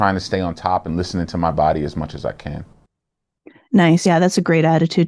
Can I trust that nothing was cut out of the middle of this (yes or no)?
yes